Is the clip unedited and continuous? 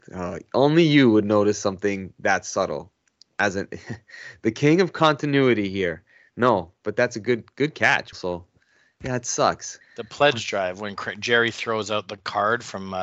no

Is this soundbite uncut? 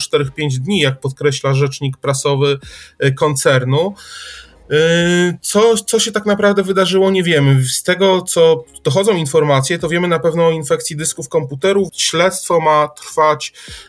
no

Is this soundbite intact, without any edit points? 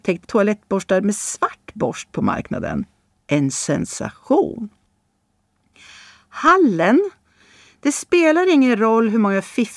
yes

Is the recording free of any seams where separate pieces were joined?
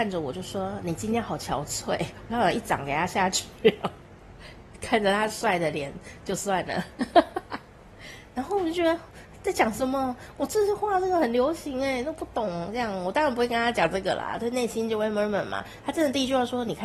yes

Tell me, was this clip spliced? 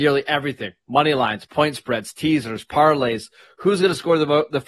no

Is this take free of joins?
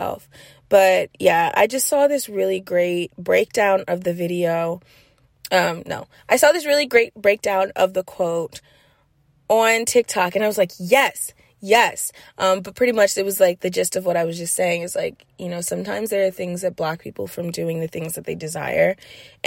yes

